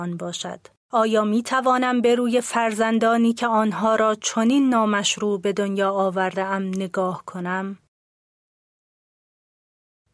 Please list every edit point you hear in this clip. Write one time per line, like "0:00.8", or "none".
none